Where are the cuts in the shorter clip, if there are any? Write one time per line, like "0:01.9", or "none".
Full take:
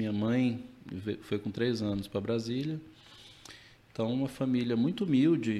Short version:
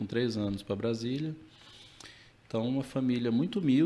none